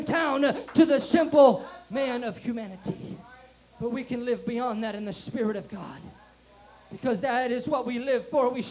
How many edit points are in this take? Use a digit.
0